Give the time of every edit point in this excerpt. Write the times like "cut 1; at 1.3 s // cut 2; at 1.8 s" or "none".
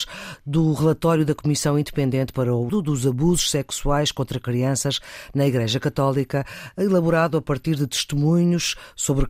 cut 1; at 2.7 s